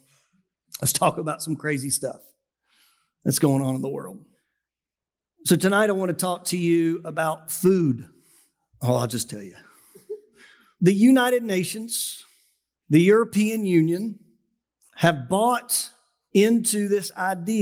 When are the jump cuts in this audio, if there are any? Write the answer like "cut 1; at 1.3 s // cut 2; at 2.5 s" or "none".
none